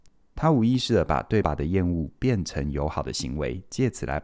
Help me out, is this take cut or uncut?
cut